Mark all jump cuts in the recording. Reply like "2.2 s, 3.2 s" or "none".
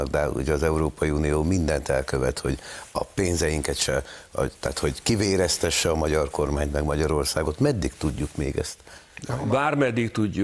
none

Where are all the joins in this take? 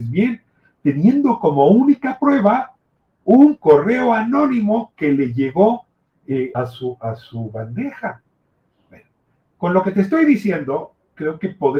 6.5 s

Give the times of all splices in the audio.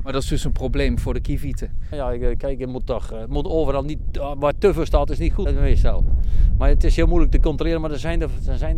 1.9 s, 5.5 s

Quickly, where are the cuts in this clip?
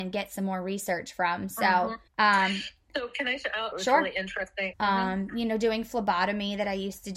2.1 s, 3.7 s, 4.7 s

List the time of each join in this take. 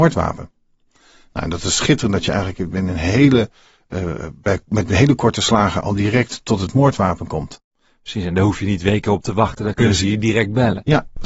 none

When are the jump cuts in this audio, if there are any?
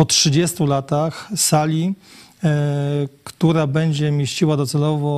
none

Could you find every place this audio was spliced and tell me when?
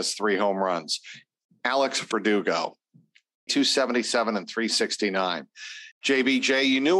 3.5 s, 5.9 s

